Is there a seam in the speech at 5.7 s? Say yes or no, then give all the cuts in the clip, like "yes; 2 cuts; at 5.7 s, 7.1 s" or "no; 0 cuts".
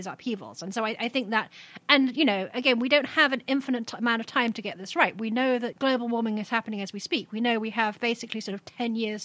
yes; 1 cut; at 5.7 s